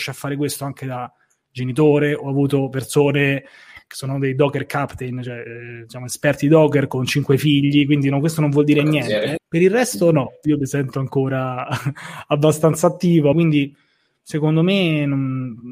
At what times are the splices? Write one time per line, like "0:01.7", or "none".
0:09.4
0:13.3